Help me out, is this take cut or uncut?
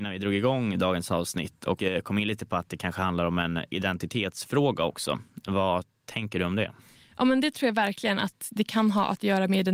uncut